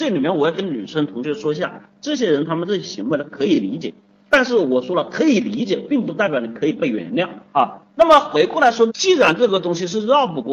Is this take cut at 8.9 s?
yes; 2 cuts; at 7.9 s, 8.9 s

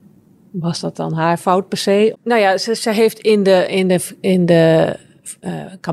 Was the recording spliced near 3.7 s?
no; 1 cut; at 2.1 s

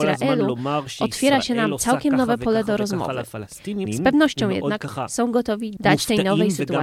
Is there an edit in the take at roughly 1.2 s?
no; 1 cut; at 3.9 s

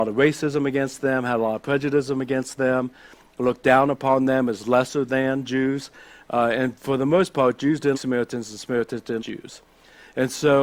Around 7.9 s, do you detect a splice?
yes; 2 cuts; at 7.9 s, 9.2 s

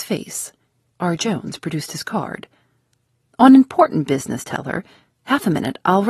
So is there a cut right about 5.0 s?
no; 1 cut; at 0.9 s

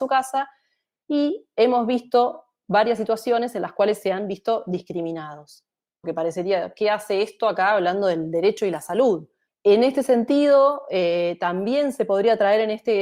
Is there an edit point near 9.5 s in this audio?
yes; 2 cuts; at 6.0 s, 9.5 s

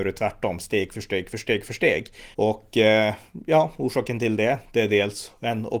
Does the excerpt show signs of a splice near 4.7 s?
no; 1 cut; at 2.3 s

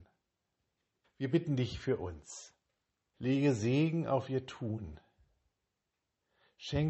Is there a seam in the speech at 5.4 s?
no; 2 cuts; at 1.0 s, 3.1 s

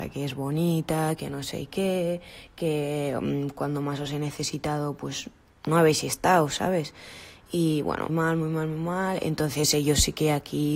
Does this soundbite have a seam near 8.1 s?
yes; 1 cut; at 8.1 s

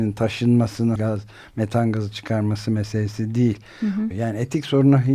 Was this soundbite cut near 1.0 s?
yes; 2 cuts; at 1.0 s, 4.1 s

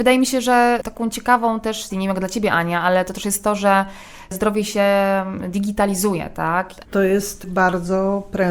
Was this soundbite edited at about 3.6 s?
no; 2 cuts; at 1.9 s, 6.8 s

